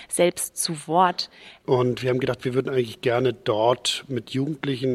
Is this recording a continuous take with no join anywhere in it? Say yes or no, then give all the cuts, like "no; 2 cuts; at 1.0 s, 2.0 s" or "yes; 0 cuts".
no; 1 cut; at 1.6 s